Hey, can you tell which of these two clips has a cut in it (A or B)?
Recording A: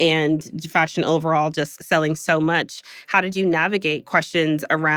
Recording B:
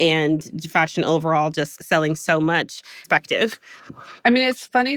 B